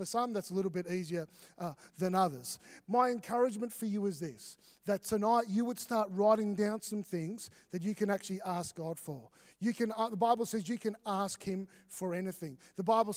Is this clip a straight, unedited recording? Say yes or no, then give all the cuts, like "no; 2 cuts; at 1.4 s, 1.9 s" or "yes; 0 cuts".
no; 2 cuts; at 2.8 s, 11.0 s